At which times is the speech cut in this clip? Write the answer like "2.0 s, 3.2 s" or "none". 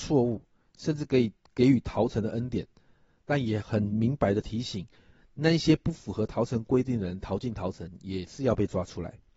3.6 s

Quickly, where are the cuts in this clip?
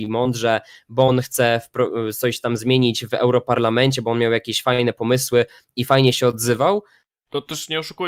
7.1 s

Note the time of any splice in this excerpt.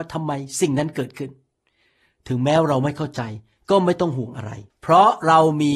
4.7 s

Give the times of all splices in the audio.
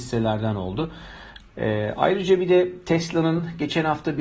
1.4 s

